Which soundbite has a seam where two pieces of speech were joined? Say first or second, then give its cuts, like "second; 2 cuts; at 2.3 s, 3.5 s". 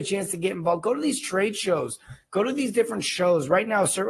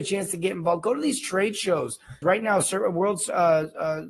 second; 1 cut; at 2.2 s